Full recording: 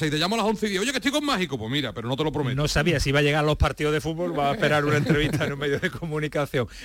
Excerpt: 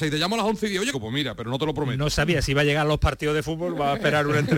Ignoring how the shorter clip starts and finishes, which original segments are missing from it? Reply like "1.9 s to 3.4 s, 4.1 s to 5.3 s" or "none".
0.9 s to 1.5 s

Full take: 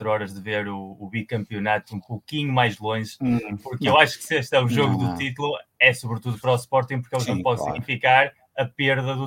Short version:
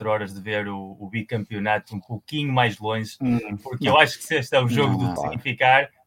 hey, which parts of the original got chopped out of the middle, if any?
5.2 s to 7.6 s

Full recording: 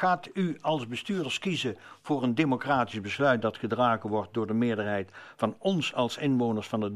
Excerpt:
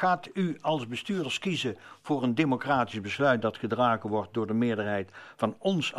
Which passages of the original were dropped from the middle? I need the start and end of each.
none

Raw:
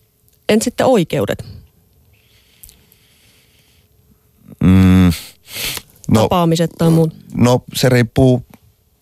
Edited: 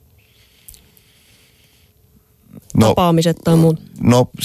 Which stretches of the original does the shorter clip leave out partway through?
4.6 s to 5.9 s

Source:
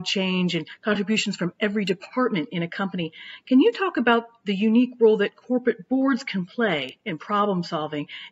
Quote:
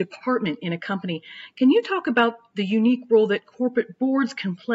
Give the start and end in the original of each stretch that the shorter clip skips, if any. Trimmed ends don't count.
none

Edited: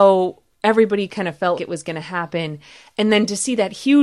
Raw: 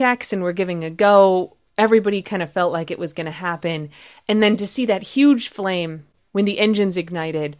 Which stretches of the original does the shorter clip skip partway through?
2.7 s to 2.9 s

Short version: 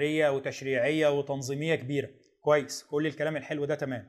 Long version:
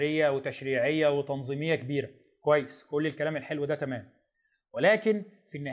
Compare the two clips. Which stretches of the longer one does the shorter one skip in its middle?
none

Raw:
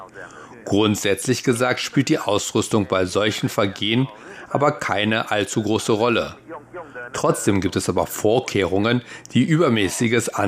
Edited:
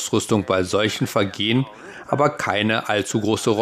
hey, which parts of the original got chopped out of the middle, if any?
none

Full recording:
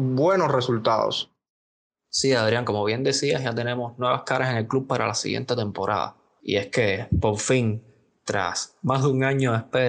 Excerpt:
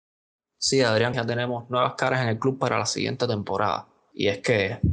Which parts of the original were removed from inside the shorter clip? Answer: 2.7 s to 3.4 s

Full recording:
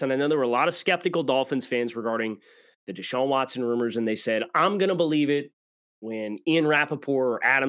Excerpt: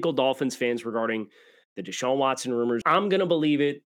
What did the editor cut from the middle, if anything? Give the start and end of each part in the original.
3.9 s to 4.5 s

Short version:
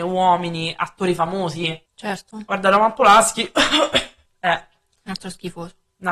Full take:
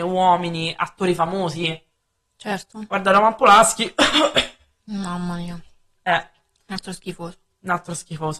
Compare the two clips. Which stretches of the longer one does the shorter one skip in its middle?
1.9 s to 2.3 s, 4.7 s to 5.9 s

